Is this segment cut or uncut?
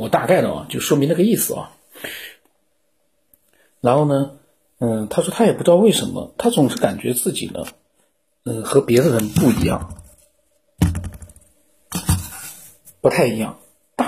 uncut